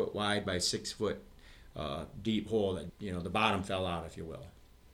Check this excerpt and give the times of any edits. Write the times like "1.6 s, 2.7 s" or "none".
2.9 s